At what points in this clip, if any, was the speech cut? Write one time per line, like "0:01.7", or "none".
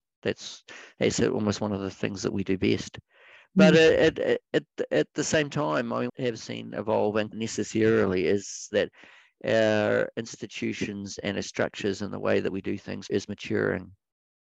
0:06.1
0:07.3